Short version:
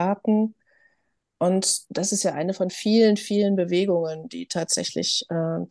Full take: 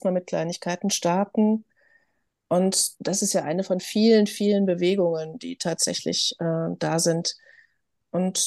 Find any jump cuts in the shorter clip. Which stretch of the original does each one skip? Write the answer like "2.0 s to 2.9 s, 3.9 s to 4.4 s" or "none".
none